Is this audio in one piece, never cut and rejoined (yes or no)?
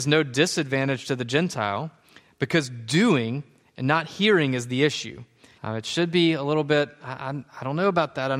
no